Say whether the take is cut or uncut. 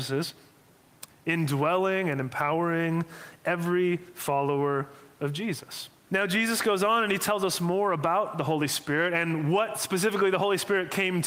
cut